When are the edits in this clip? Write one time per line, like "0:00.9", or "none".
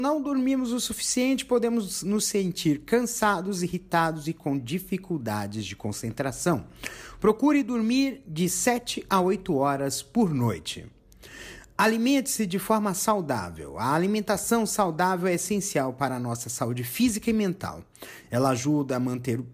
none